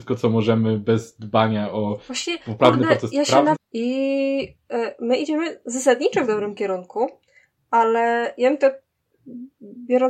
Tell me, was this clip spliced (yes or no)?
yes